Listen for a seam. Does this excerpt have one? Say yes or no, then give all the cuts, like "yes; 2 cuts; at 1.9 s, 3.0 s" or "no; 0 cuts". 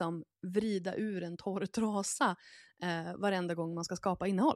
no; 0 cuts